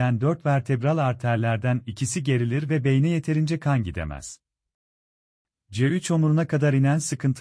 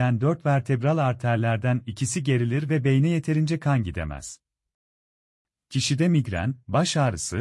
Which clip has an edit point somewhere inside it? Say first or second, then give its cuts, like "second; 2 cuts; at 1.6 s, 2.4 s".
first; 1 cut; at 5.5 s